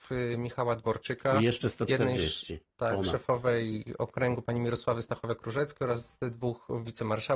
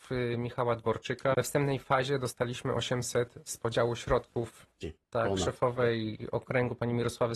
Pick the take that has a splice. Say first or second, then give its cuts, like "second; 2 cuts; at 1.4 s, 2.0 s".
second; 2 cuts; at 1.3 s, 4.8 s